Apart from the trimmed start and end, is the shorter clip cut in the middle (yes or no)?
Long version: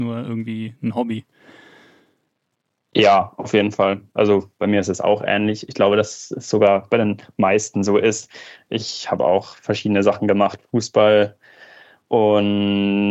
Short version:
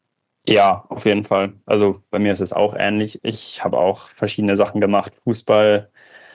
yes